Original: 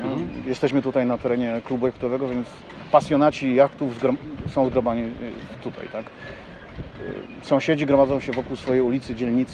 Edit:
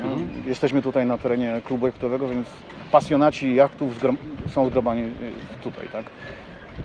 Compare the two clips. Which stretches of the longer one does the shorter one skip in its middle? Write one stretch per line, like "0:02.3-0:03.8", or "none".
none